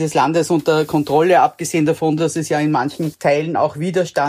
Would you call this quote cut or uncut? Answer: uncut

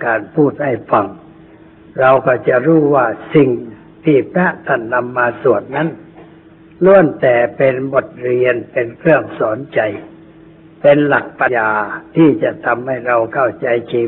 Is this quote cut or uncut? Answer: cut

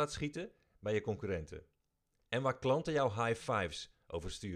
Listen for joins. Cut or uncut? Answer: uncut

